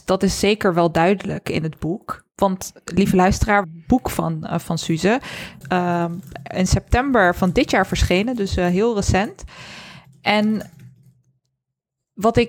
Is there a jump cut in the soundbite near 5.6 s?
yes; 2 cuts; at 3.6 s, 5.6 s

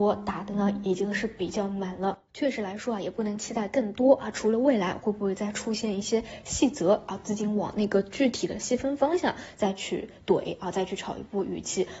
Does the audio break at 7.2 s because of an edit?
no; 0 cuts

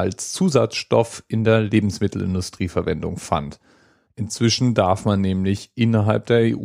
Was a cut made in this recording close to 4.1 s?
yes; 1 cut; at 4.1 s

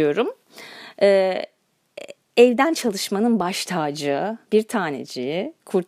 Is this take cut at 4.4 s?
yes; 1 cut; at 4.4 s

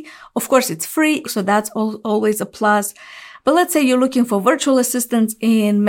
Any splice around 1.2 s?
yes; 1 cut; at 1.2 s

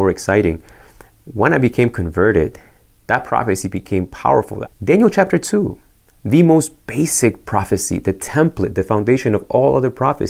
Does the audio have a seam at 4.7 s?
yes; 1 cut; at 4.7 s

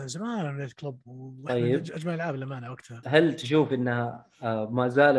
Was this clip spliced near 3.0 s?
yes; 1 cut; at 3.0 s

